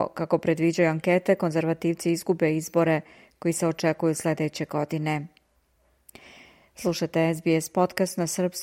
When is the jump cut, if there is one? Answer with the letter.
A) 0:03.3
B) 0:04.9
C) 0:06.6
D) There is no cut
D